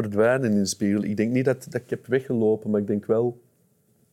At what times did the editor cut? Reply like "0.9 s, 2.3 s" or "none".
none